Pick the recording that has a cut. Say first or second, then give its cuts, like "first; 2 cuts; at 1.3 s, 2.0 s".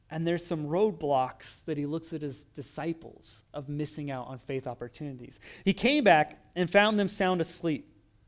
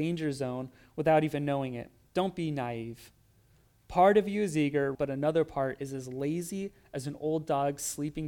second; 1 cut; at 4.9 s